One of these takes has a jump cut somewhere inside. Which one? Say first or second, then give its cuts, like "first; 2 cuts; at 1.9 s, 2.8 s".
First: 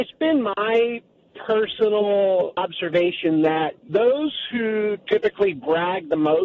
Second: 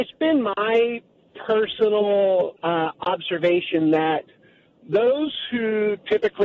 first; 2 cuts; at 2.5 s, 3.8 s